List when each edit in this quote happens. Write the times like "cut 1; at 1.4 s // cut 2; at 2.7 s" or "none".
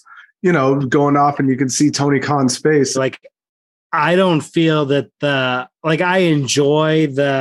cut 1; at 2.9 s